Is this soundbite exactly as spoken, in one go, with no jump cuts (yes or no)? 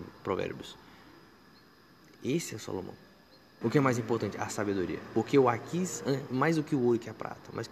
no